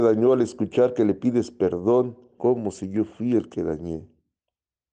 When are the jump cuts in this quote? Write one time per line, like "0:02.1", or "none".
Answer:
0:02.4

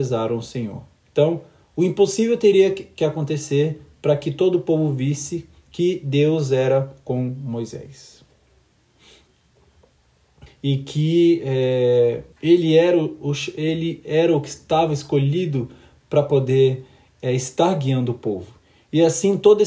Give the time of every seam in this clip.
0:10.5
0:12.3

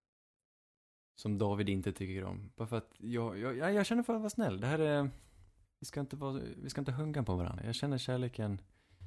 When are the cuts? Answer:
0:05.7
0:07.6

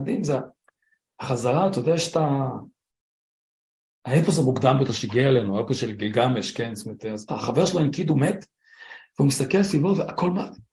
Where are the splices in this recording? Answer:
0:07.3

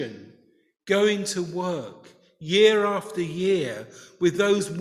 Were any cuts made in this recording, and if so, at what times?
none

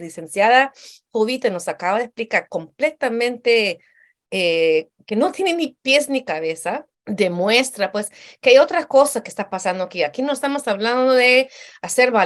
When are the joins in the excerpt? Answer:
0:06.9

